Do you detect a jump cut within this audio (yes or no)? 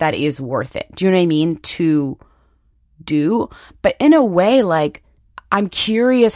no